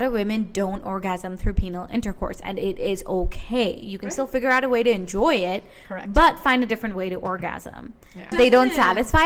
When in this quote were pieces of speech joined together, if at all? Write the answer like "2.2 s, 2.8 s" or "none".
8.3 s